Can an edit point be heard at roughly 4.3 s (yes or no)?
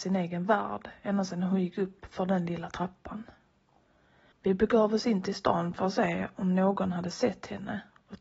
yes